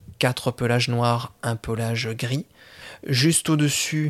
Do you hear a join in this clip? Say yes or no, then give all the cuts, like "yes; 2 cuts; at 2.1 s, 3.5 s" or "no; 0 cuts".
no; 0 cuts